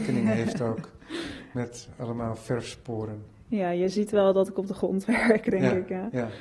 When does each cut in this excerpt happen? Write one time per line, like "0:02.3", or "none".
none